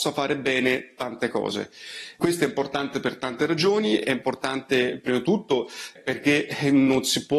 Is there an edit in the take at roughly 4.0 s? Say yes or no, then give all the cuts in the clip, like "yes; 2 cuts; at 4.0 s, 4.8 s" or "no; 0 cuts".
no; 2 cuts; at 2.2 s, 6.0 s